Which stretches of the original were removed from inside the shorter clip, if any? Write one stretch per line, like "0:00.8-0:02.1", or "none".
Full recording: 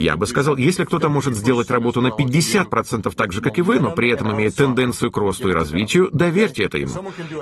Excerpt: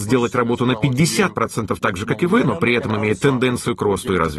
none